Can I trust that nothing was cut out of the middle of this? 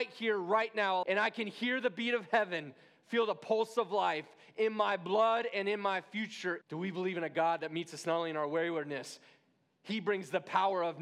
no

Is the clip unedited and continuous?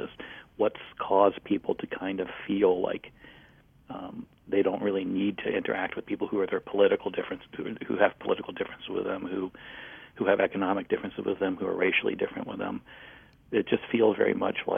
yes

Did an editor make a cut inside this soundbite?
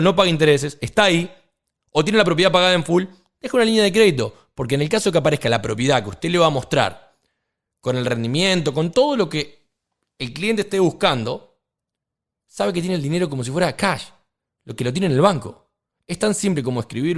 no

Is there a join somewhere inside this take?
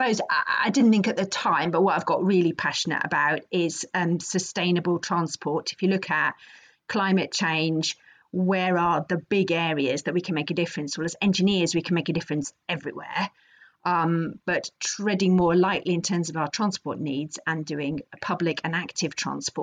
no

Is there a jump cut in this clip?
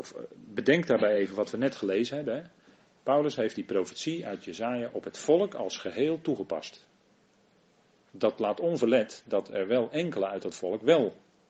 no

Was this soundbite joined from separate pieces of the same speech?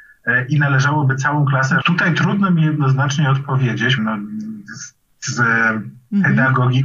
yes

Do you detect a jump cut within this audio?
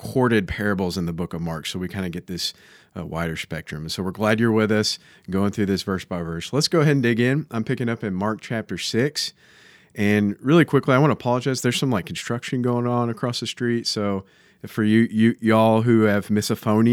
no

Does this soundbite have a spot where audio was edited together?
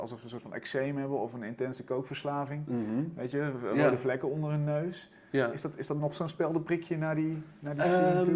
no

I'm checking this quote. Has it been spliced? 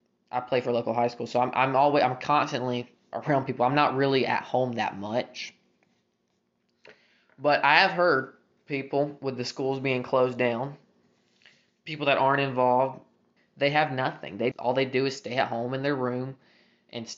yes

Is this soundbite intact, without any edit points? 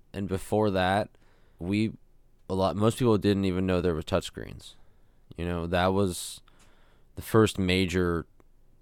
no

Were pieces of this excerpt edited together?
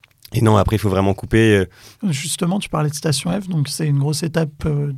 yes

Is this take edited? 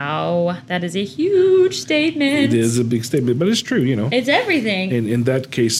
yes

